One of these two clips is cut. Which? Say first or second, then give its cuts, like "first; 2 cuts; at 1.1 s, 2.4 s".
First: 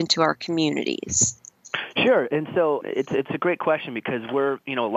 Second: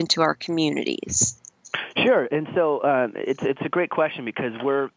first; 1 cut; at 2.8 s